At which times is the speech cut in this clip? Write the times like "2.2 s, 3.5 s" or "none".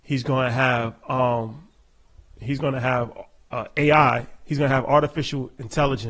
none